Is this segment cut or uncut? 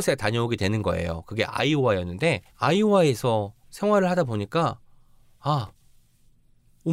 cut